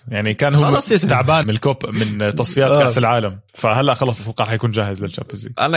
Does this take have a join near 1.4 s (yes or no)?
yes